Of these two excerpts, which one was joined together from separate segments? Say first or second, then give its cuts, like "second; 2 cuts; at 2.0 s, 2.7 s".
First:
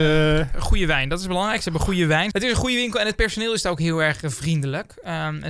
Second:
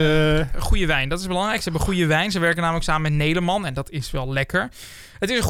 first; 1 cut; at 2.3 s